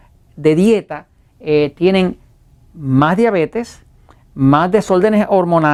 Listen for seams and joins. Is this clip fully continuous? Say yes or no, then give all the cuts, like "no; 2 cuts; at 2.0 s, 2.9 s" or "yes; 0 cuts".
yes; 0 cuts